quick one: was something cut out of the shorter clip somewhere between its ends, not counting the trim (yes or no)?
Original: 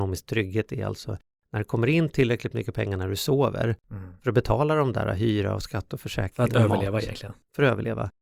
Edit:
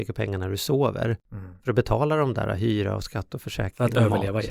no